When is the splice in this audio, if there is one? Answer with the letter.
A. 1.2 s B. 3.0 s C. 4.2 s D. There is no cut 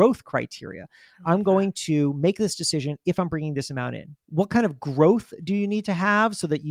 C